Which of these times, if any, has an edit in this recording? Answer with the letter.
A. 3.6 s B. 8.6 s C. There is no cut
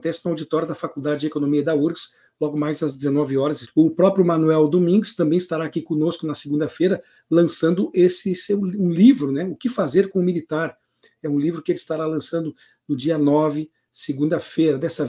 A